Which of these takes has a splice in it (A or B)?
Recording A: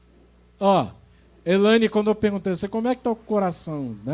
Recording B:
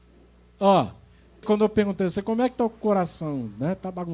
B